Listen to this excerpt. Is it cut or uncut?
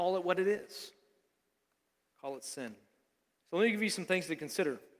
cut